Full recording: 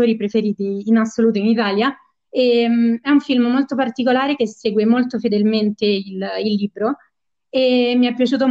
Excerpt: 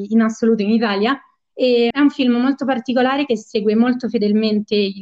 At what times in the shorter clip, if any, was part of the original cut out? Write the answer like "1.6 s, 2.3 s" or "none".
1.9 s